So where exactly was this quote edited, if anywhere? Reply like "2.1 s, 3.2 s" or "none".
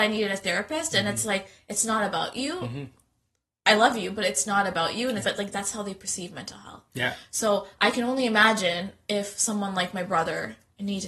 5.2 s